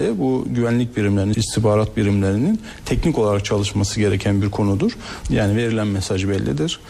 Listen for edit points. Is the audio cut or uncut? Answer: cut